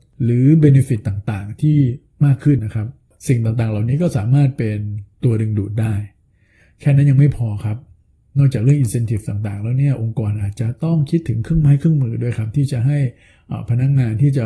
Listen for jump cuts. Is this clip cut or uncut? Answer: cut